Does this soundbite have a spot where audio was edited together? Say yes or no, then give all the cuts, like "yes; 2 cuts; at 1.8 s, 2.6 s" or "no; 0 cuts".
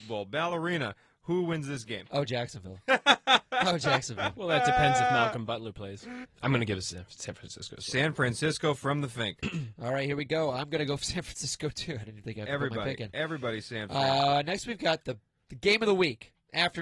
yes; 1 cut; at 6.2 s